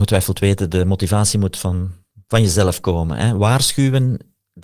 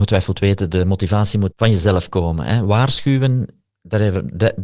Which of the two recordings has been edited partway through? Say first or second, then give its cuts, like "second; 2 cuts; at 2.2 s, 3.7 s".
second; 1 cut; at 1.5 s